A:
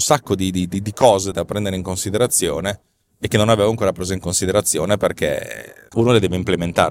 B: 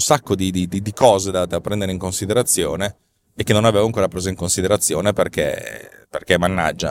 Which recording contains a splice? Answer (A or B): A